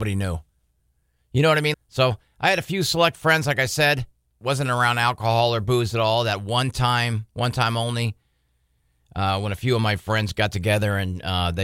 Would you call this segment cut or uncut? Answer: cut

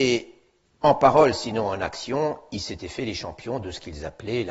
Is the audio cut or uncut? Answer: uncut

